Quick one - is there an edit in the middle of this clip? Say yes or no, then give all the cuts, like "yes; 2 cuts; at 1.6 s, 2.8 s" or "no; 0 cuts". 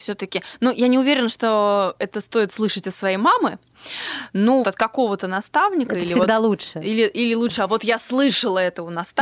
yes; 1 cut; at 4.6 s